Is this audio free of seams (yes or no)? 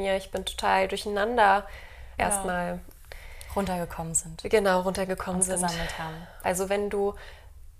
no